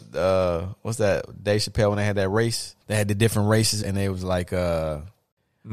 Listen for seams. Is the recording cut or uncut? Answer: cut